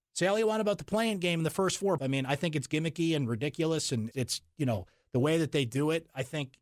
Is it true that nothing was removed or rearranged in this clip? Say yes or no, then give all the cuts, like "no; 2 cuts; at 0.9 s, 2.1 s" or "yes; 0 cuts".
no; 2 cuts; at 2.0 s, 4.1 s